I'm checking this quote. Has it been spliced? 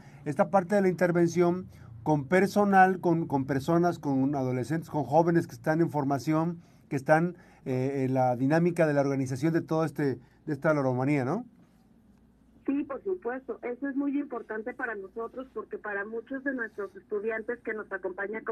no; 0 cuts

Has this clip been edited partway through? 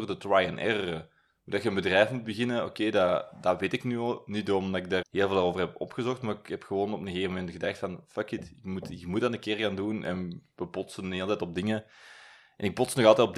yes; 1 cut; at 5.0 s

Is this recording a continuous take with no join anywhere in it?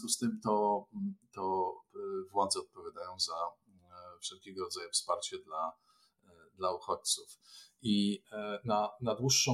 yes; 0 cuts

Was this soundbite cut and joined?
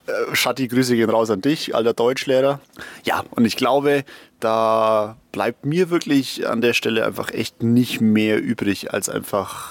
no; 0 cuts

